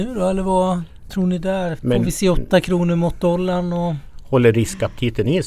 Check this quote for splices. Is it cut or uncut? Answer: cut